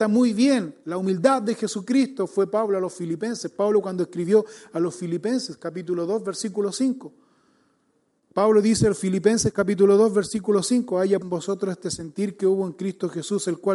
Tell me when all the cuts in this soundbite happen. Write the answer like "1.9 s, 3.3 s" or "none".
11.2 s